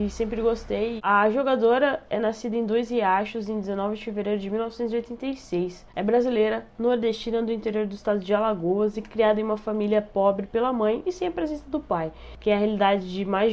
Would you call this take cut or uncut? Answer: cut